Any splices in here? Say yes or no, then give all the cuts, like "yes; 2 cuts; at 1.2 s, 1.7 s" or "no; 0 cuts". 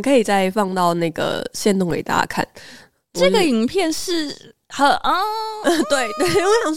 no; 0 cuts